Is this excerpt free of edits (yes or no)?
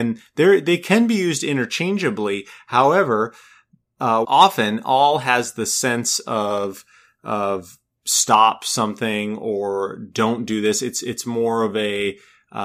no